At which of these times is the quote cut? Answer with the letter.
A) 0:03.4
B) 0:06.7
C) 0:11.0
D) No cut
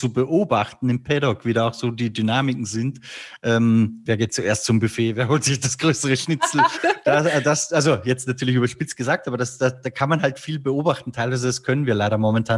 B